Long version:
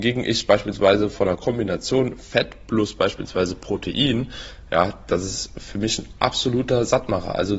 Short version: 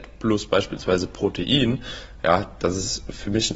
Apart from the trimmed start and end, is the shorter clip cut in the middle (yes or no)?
no